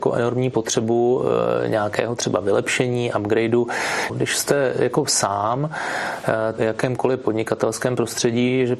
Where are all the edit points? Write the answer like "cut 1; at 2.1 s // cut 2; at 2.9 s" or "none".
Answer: cut 1; at 4.1 s // cut 2; at 6.6 s